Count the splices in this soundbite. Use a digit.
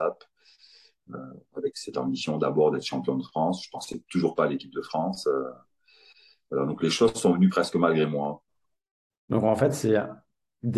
0